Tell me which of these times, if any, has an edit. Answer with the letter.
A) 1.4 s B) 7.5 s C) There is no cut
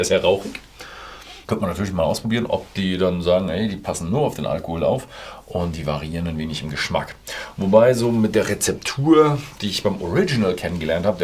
A